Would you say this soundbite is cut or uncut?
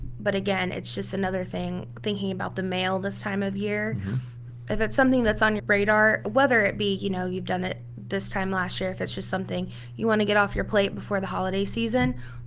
cut